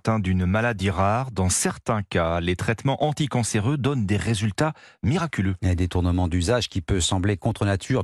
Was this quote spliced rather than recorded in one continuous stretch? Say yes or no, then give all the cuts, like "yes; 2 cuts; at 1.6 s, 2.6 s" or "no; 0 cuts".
no; 0 cuts